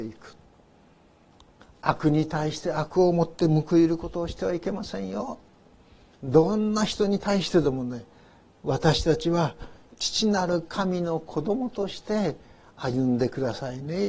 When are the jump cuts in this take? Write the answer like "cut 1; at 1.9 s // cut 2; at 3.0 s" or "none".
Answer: none